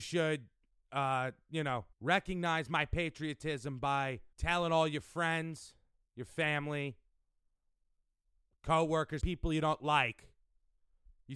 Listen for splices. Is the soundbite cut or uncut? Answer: cut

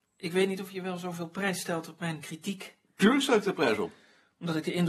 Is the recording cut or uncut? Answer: uncut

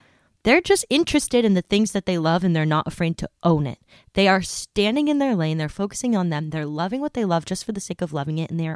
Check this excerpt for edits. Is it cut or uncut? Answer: uncut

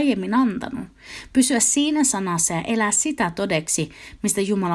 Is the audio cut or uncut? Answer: uncut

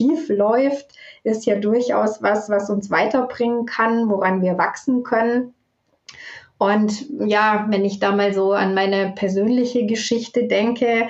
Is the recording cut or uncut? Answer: uncut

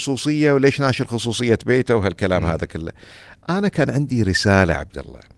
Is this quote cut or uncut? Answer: uncut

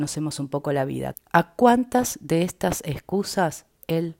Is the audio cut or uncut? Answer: cut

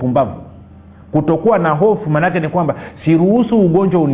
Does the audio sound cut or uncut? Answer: uncut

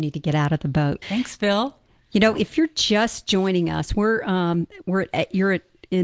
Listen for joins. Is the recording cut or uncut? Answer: cut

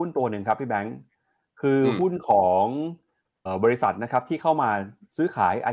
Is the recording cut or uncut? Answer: cut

